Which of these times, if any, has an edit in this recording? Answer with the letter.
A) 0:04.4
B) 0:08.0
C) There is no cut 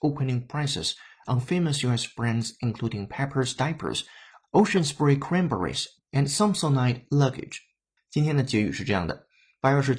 B